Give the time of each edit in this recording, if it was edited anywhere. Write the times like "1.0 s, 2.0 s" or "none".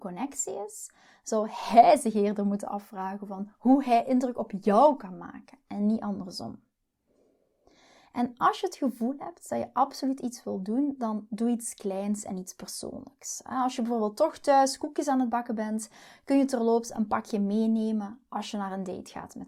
none